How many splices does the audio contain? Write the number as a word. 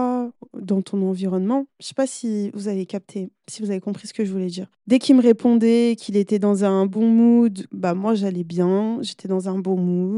two